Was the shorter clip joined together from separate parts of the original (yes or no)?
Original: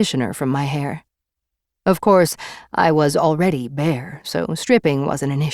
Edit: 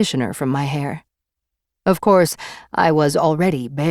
no